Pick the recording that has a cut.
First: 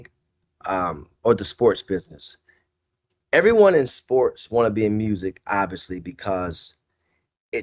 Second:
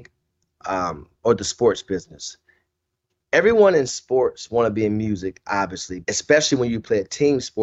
second; 1 cut; at 6.0 s

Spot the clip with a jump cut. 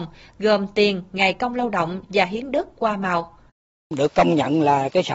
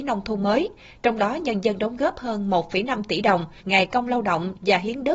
second; 1 cut; at 3.6 s

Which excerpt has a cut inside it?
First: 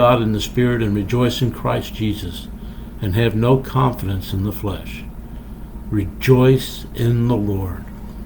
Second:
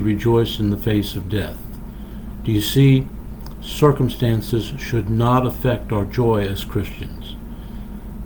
first; 1 cut; at 5.8 s

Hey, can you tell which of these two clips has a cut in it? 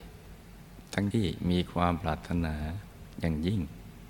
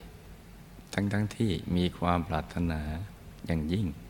first; 1 cut; at 1.1 s

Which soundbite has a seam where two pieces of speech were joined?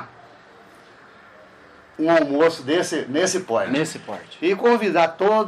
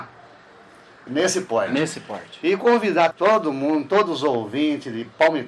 second; 2 cuts; at 1.1 s, 3.1 s

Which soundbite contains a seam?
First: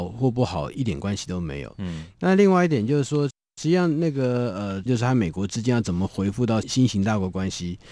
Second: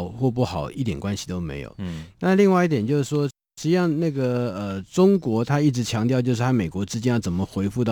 first; 2 cuts; at 4.9 s, 6.6 s

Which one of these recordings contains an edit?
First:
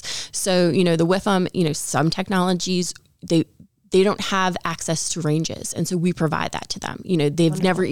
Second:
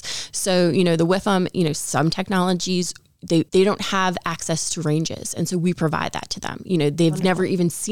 second; 1 cut; at 3.5 s

